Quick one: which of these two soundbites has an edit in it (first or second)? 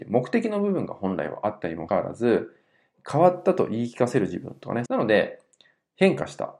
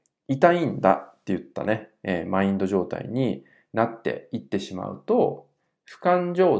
first